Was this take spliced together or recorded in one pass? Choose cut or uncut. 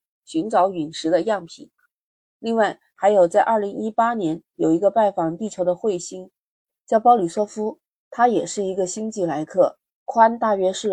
cut